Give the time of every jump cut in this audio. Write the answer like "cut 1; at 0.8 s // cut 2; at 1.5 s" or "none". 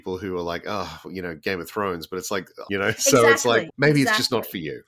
cut 1; at 2.7 s // cut 2; at 3.7 s